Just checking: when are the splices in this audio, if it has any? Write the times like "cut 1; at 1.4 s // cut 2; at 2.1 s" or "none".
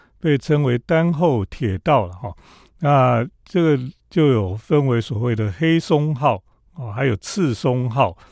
none

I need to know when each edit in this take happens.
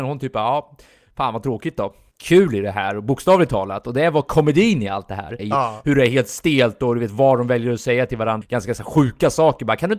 cut 1; at 2.1 s // cut 2; at 5.4 s // cut 3; at 8.4 s

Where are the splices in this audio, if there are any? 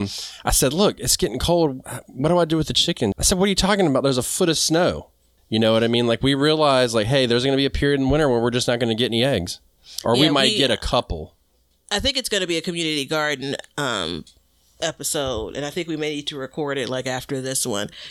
cut 1; at 3.1 s // cut 2; at 5.4 s

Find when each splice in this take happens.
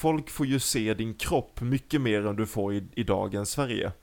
none

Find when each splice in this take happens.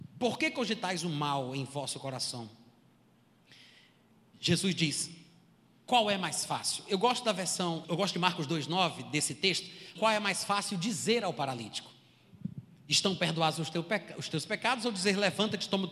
cut 1; at 7.8 s // cut 2; at 10.0 s

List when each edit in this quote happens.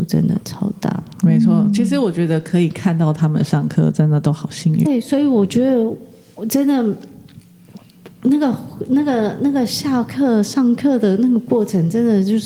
cut 1; at 4.8 s

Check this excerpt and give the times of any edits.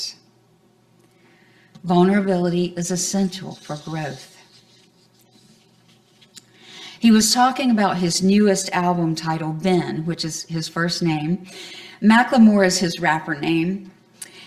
cut 1; at 7.0 s

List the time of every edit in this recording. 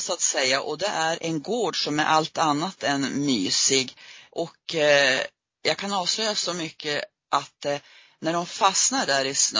cut 1; at 1.2 s // cut 2; at 4.3 s

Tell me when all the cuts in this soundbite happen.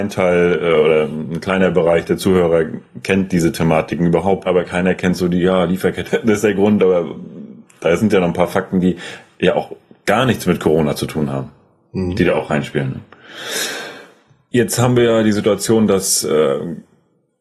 cut 1; at 4.5 s // cut 2; at 6.1 s

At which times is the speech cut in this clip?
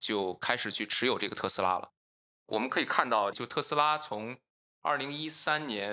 cut 1; at 2.3 s // cut 2; at 3.3 s

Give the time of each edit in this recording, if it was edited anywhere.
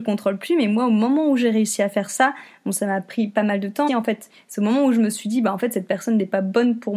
cut 1; at 3.9 s

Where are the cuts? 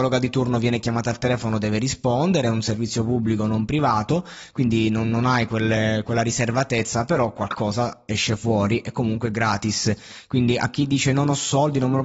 none

